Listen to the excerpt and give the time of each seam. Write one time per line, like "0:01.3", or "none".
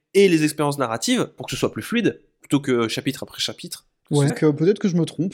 0:04.3

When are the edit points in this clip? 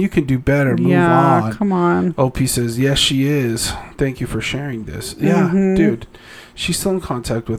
none

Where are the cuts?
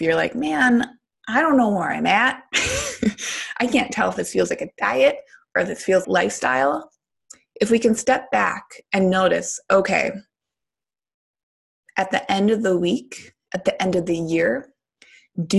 0:06.0
0:13.5

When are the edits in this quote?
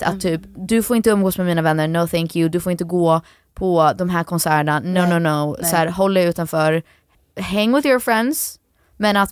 none

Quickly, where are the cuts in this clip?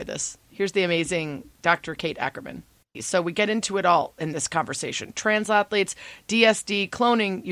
0:02.9

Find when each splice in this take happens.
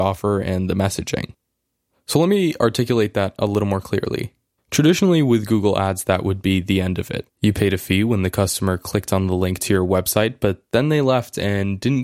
0:04.6

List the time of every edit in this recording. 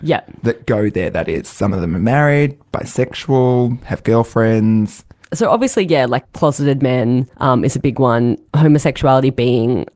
none

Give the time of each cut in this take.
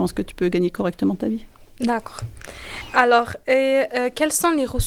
none

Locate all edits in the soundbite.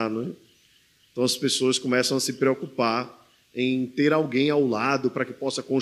none

